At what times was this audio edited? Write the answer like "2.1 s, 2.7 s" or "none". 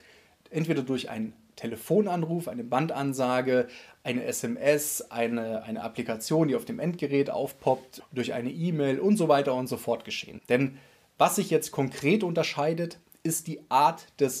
8.0 s, 10.4 s